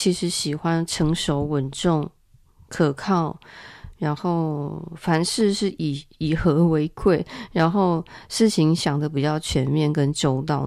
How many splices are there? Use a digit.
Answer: 0